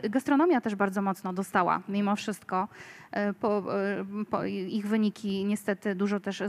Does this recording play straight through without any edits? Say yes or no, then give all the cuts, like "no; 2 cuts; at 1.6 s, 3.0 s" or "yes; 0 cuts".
yes; 0 cuts